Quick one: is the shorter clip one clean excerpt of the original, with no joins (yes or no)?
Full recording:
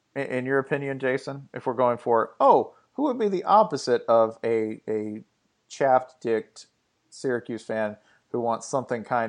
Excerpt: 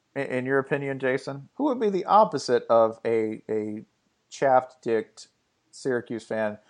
no